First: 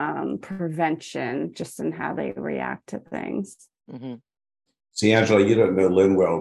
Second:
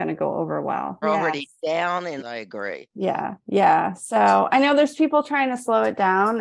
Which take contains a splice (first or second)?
second